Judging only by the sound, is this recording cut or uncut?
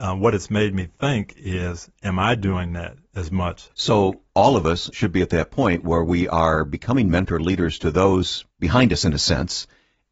cut